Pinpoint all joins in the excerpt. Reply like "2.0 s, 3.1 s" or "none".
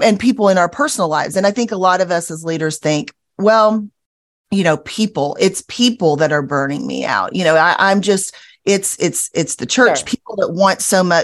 10.1 s

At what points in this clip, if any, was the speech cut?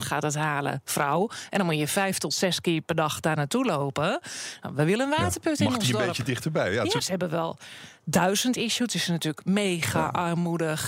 7.0 s

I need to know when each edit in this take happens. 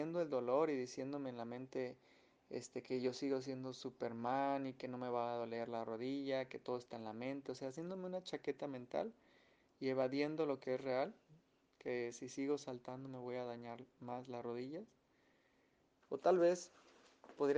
16.0 s

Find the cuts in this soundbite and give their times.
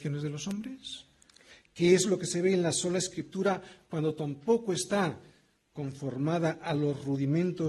none

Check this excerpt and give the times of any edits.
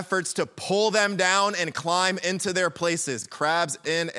none

